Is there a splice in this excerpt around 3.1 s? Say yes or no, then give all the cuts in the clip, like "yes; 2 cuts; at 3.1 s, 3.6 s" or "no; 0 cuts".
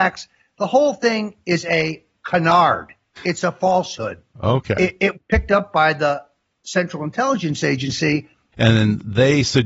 no; 2 cuts; at 5.1 s, 8.5 s